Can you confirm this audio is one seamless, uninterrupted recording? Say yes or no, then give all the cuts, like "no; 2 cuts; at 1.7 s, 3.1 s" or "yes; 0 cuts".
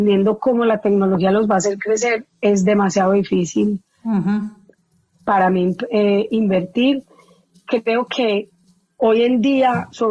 yes; 0 cuts